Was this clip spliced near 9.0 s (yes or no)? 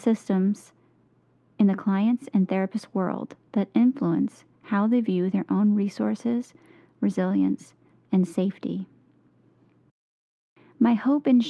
no